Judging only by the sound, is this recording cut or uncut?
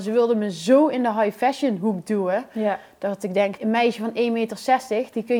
cut